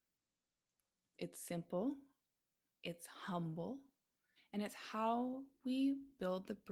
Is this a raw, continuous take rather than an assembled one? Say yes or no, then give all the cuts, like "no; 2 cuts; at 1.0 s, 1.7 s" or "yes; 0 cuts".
no; 2 cuts; at 1.1 s, 4.4 s